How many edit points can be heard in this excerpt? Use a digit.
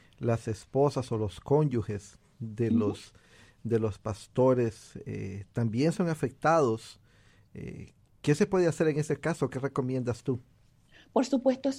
0